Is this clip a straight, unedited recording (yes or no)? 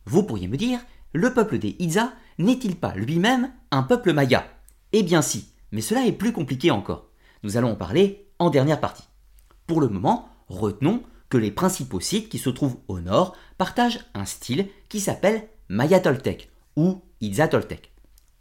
yes